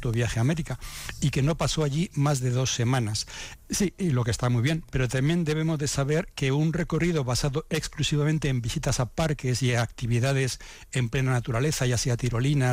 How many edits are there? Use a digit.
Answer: 1